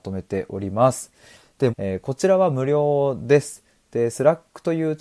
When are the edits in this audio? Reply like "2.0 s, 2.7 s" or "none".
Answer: 1.7 s

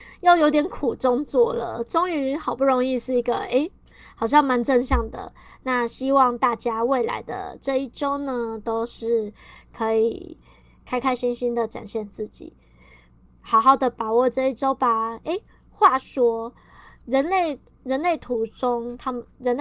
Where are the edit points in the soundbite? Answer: none

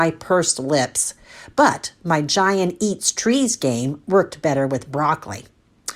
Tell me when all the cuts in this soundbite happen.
none

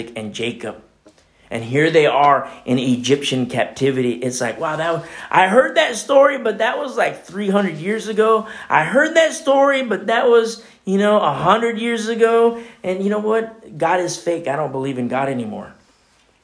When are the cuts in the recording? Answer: none

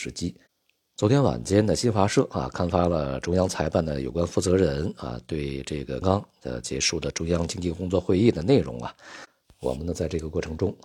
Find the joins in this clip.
6.0 s, 9.4 s

